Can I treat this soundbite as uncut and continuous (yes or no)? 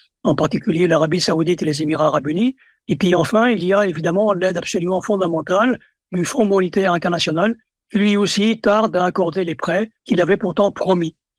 no